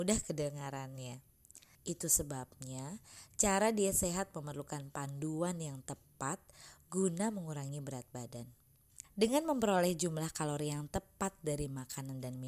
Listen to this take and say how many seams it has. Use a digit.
2